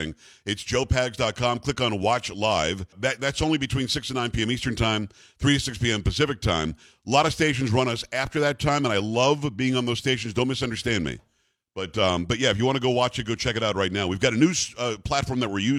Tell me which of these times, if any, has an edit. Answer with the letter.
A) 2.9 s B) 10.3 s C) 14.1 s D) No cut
A